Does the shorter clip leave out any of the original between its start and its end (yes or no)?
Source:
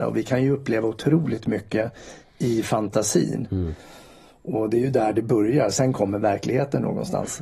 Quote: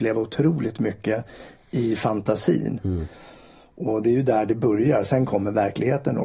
no